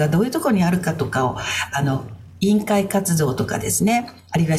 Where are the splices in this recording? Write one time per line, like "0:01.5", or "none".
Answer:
none